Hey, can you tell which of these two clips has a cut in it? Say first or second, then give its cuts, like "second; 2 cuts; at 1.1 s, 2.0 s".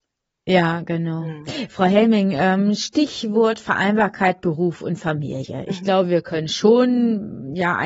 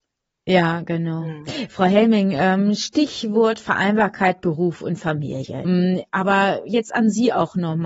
second; 1 cut; at 5.6 s